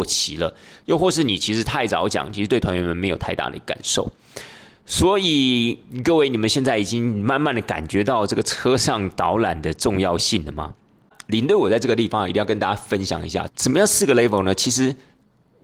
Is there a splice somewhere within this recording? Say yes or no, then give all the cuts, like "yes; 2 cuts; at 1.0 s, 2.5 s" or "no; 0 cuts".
yes; 1 cut; at 13.5 s